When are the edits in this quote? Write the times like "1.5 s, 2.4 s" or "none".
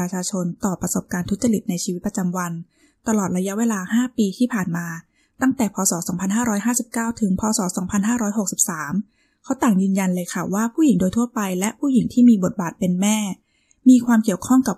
none